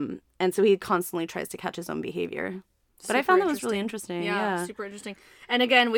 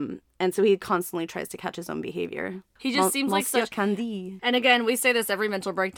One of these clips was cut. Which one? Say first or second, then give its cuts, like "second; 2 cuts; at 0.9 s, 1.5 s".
second; 2 cuts; at 2.8 s, 4.4 s